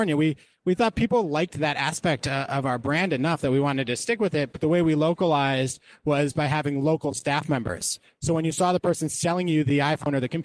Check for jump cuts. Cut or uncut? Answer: uncut